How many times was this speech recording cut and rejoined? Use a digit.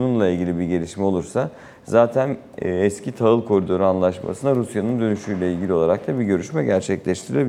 0